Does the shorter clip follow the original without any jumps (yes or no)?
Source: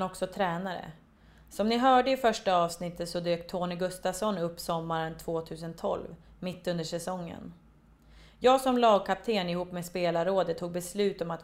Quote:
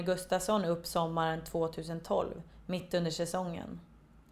yes